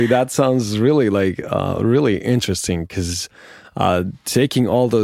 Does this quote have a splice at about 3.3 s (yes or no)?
no